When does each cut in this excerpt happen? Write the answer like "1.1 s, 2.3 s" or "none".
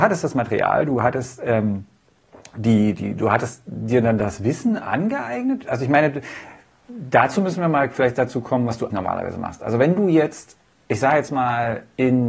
8.9 s